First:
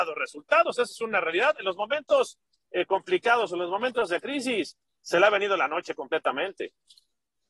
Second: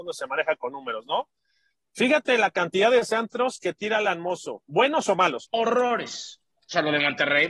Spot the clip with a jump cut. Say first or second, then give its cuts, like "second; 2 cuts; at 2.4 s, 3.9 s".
second; 1 cut; at 5.4 s